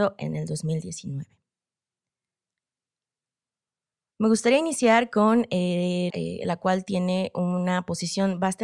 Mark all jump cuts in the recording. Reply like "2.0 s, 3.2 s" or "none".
6.1 s